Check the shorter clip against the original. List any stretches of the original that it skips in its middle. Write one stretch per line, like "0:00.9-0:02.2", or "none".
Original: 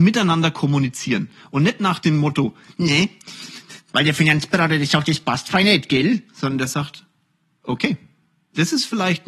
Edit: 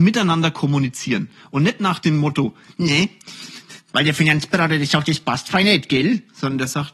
none